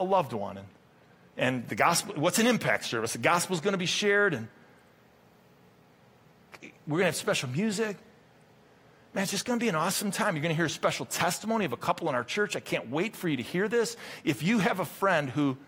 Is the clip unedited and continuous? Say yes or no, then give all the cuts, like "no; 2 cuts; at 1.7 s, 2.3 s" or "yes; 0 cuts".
yes; 0 cuts